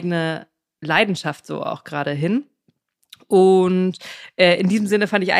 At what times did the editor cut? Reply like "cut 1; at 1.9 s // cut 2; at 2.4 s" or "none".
none